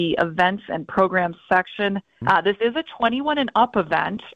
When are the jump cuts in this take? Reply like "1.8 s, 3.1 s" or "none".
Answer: 2.2 s